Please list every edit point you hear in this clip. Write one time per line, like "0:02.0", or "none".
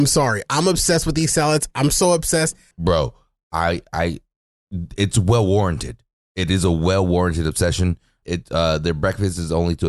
0:02.7
0:08.2